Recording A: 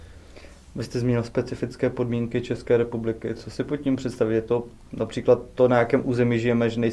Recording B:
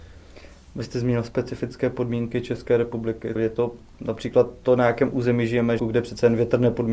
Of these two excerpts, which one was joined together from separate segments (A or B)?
B